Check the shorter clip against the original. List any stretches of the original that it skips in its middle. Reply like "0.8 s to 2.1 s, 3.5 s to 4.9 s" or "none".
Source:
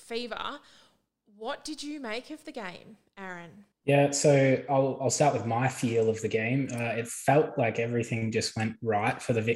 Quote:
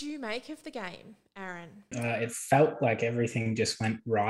3.7 s to 6.7 s